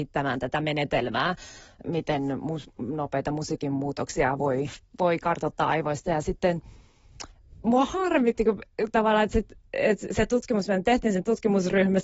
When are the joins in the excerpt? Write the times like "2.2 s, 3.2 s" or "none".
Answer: none